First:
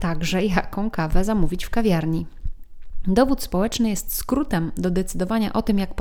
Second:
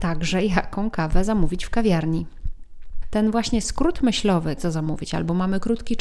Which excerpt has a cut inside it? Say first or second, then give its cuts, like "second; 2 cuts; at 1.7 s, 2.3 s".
second; 2 cuts; at 3.0 s, 4.6 s